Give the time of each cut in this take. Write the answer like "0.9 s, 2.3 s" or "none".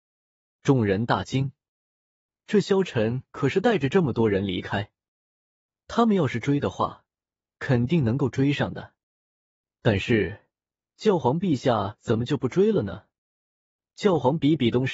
none